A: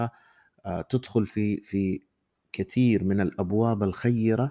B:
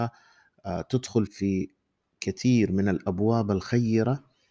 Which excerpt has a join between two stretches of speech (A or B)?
B